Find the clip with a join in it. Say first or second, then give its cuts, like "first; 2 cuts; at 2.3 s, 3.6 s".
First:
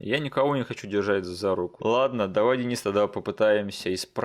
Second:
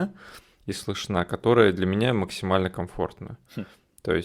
first; 1 cut; at 1.8 s